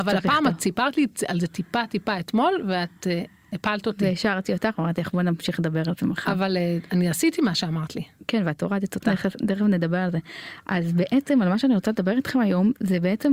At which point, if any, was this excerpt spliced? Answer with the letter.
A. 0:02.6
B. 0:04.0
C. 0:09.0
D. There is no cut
C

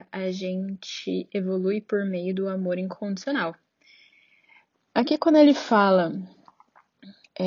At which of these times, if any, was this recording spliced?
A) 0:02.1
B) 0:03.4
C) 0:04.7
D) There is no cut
C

